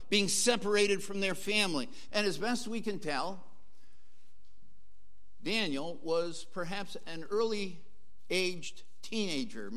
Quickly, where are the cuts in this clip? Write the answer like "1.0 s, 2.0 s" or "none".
2.1 s

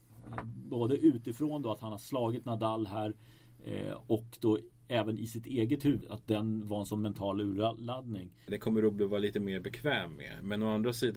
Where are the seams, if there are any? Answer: 6.0 s, 8.5 s

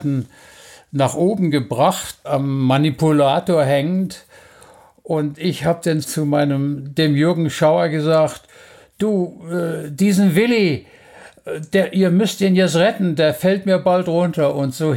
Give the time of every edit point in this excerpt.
2.2 s

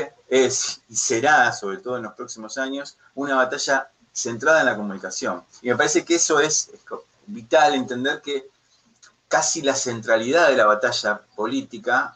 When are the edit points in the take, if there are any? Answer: 5.6 s, 6.7 s

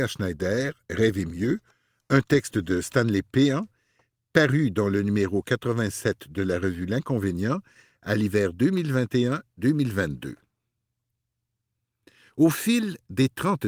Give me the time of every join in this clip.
none

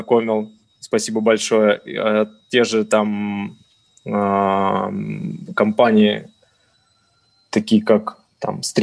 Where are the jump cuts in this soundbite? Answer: none

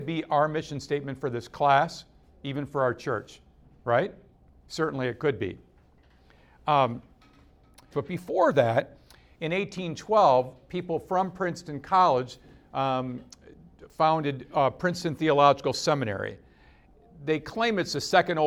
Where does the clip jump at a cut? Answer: 7.9 s

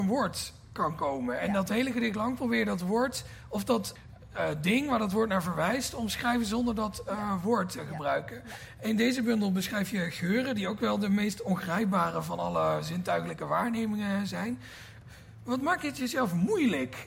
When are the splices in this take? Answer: none

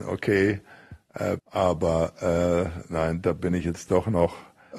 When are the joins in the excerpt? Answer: 1.4 s

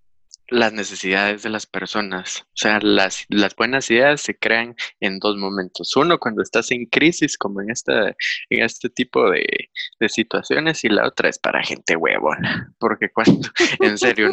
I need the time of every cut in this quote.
none

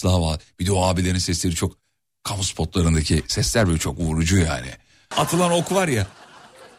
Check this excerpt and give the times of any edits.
5.1 s

